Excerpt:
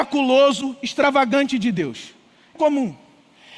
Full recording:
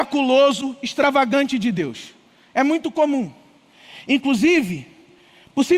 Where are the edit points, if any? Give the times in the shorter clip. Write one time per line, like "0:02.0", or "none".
0:02.6